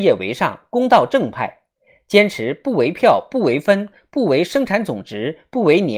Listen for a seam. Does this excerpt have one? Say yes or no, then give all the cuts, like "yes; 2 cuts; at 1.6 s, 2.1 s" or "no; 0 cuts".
no; 0 cuts